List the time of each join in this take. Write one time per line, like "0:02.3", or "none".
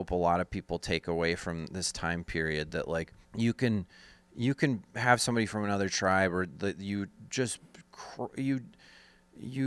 0:03.2